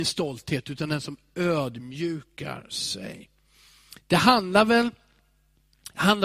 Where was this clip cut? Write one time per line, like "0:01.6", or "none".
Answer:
none